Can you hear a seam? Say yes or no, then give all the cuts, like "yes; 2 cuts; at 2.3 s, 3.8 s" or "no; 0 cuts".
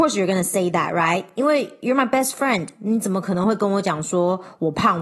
no; 0 cuts